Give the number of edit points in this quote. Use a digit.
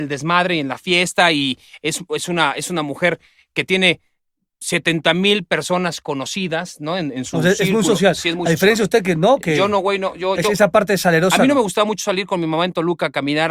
0